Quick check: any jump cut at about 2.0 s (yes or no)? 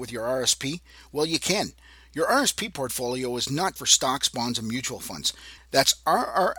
no